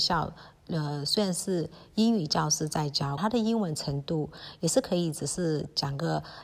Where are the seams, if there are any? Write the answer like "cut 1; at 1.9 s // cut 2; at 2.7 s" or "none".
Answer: cut 1; at 3.2 s